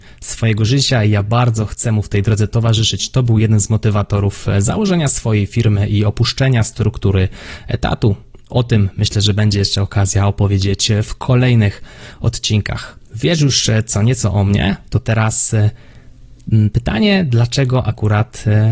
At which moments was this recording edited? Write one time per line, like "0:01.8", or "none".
0:13.1